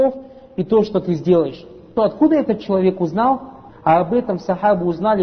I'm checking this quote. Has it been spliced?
yes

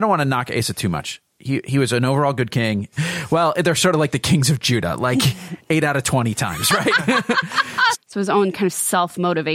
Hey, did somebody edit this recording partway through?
yes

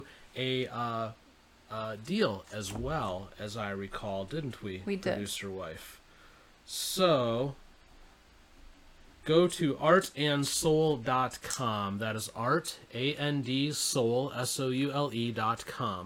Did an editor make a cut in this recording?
no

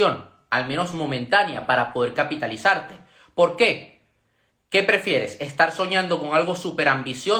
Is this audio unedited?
yes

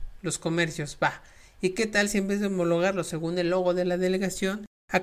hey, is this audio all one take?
yes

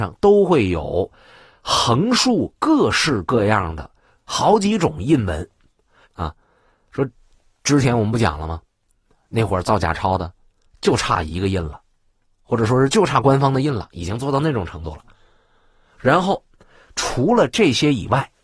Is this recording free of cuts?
no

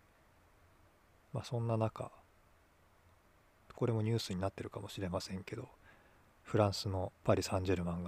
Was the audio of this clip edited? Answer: yes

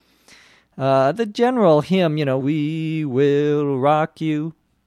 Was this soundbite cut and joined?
yes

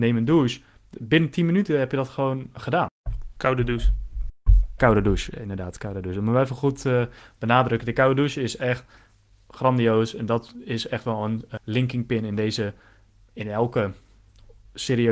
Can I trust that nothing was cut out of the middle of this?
no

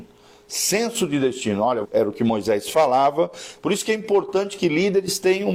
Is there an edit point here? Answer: yes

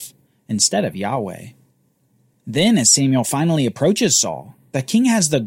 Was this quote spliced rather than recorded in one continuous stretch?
no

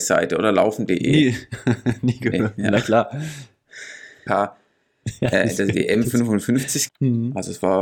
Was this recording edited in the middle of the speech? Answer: yes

